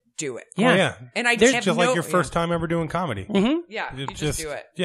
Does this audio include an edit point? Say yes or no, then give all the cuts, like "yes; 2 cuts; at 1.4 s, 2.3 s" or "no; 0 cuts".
yes; 1 cut; at 1.5 s